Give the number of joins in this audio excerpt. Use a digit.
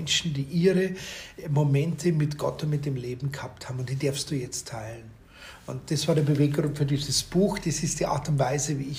0